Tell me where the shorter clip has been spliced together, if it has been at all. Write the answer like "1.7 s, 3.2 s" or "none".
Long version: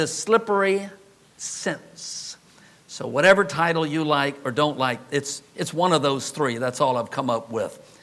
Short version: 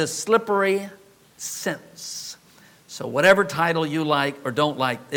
none